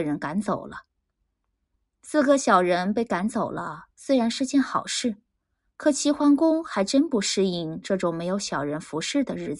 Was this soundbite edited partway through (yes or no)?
no